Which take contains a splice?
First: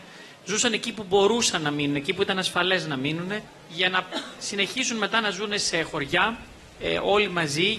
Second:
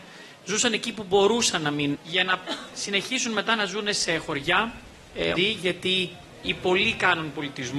second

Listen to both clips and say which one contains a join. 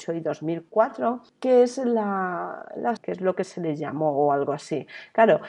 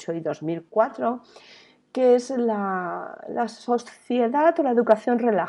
first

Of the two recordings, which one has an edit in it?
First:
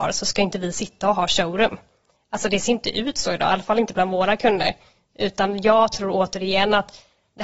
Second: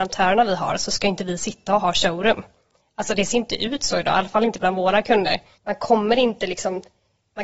second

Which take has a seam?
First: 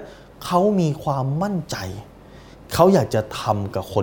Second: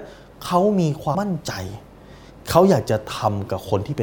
second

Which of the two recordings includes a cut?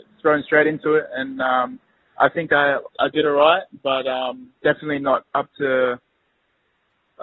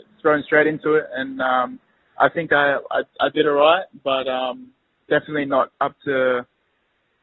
first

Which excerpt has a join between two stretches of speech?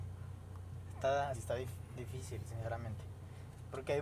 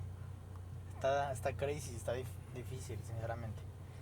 first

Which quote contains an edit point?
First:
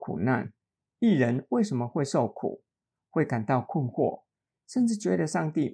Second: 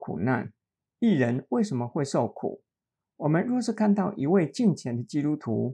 first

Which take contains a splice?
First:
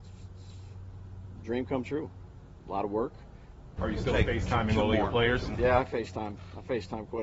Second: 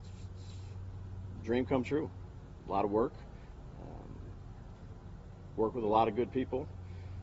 first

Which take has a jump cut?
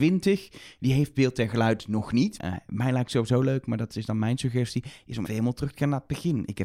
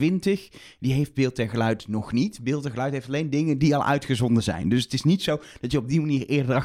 first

